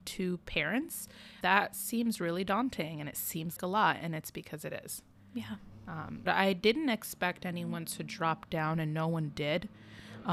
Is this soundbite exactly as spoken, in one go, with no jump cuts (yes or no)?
no